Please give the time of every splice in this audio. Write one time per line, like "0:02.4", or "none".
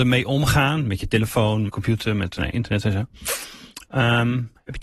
0:01.7